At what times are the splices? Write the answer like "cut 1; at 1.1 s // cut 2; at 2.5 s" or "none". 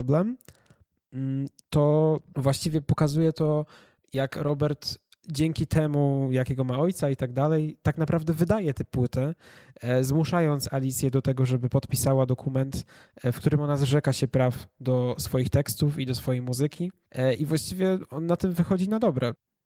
none